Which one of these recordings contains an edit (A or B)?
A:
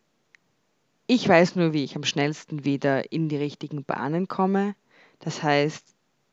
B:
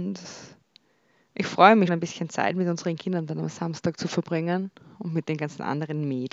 B